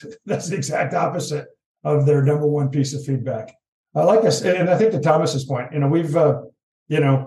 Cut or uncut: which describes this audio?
uncut